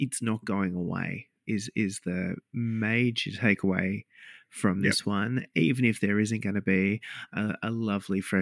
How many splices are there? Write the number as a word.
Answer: zero